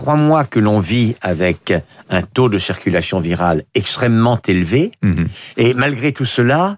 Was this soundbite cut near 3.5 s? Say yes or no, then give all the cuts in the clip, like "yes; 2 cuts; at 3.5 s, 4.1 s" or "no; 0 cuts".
no; 1 cut; at 5.5 s